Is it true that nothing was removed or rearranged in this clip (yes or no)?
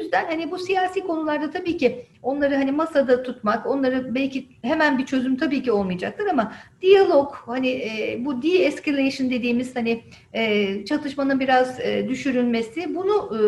yes